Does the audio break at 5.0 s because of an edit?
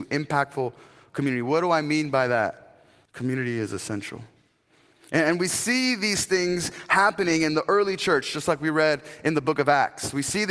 no; 1 cut; at 3.1 s

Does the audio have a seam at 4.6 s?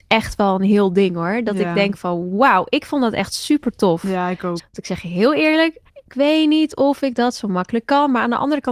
yes; 2 cuts; at 4.6 s, 5.9 s

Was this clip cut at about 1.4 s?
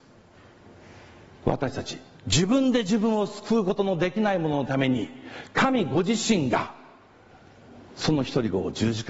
yes; 1 cut; at 1.4 s

